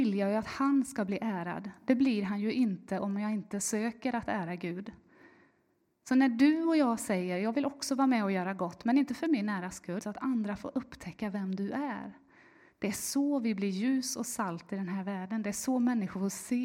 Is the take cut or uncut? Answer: cut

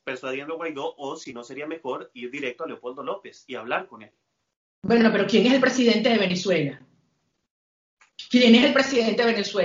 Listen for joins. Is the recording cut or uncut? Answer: uncut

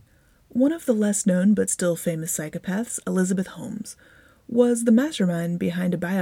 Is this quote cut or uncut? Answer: uncut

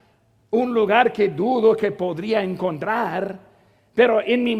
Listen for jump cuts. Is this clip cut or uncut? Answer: uncut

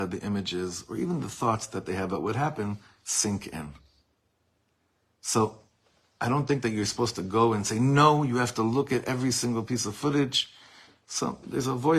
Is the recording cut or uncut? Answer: uncut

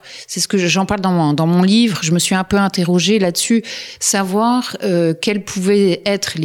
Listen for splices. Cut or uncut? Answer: uncut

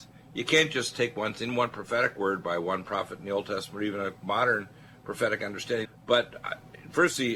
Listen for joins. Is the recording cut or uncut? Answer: cut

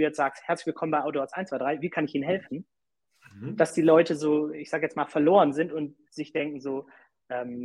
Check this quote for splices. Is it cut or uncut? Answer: uncut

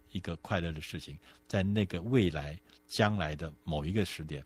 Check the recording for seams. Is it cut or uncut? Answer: uncut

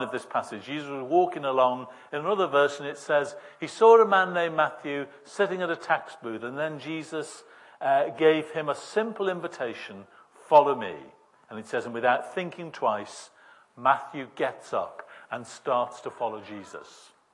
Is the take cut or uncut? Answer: uncut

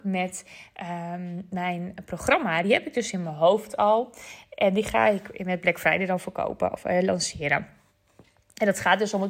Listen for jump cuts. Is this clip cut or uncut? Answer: uncut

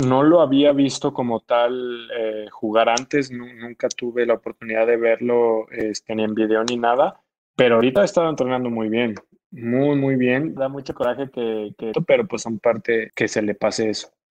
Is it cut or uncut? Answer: cut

